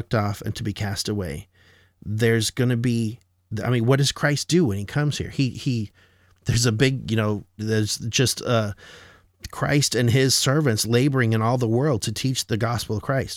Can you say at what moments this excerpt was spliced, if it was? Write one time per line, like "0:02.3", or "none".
0:07.6

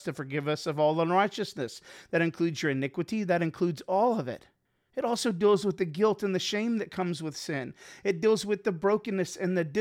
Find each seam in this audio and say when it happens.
none

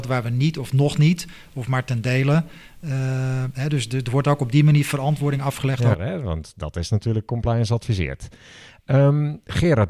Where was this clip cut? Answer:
0:05.9

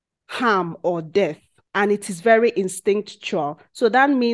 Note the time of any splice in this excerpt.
none

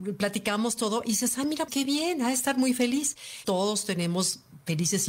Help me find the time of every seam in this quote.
0:01.7
0:03.4

